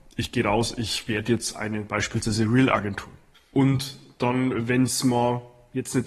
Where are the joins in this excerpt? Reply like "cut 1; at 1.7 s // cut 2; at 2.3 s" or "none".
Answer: cut 1; at 3.3 s